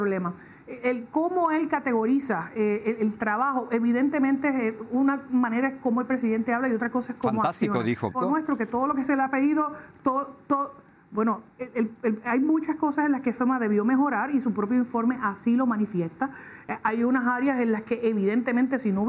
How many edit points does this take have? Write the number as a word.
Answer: one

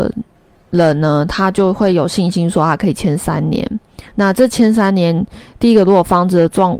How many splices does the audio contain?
zero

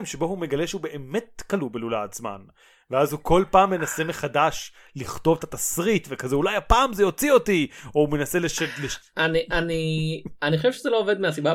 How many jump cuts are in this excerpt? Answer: zero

